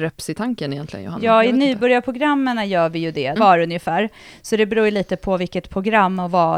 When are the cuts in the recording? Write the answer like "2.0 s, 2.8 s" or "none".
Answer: 3.4 s